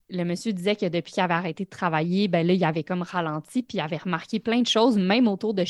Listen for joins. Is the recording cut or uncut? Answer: uncut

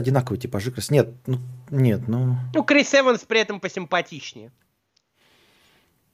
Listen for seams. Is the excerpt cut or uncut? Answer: uncut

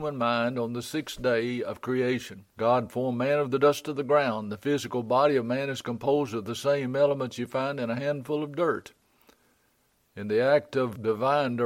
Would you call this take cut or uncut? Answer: cut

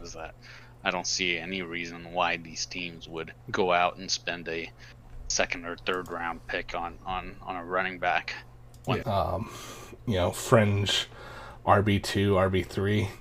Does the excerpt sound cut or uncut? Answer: cut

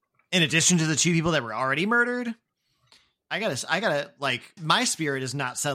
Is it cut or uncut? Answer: cut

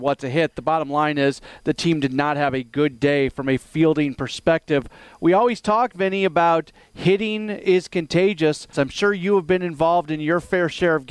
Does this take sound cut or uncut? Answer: cut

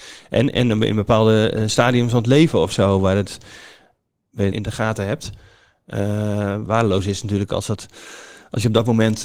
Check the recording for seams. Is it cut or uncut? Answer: cut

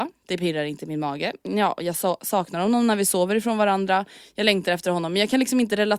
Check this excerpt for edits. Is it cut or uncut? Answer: uncut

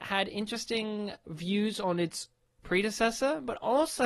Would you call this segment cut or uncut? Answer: cut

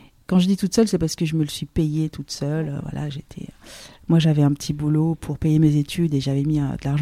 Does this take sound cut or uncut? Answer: uncut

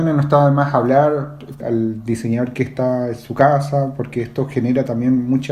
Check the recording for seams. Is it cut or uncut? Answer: cut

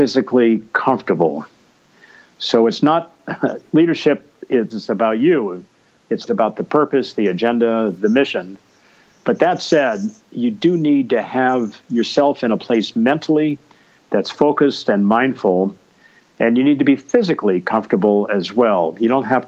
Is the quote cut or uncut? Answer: cut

